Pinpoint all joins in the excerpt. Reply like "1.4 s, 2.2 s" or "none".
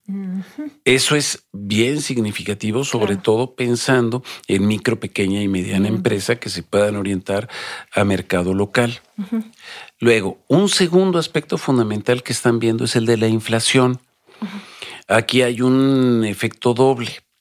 none